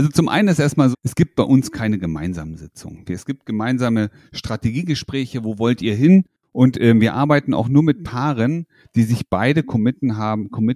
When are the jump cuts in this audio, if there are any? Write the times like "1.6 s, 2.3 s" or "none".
0.9 s